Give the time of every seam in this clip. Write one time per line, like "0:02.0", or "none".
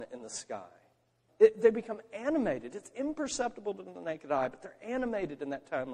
0:01.3